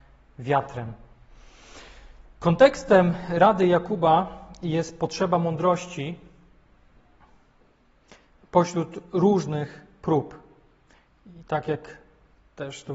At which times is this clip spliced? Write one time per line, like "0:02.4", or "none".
none